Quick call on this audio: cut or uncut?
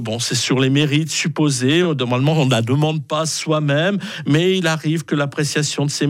uncut